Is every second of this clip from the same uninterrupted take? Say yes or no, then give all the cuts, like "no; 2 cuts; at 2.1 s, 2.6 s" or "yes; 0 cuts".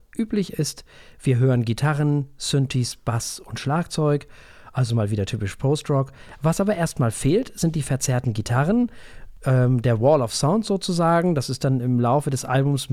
yes; 0 cuts